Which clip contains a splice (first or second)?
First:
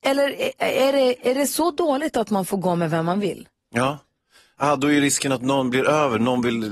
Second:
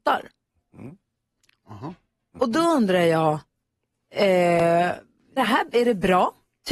second